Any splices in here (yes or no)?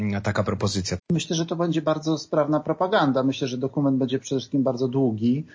yes